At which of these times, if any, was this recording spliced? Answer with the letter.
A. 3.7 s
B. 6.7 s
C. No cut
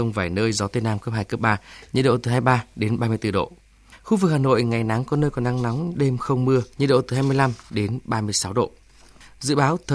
B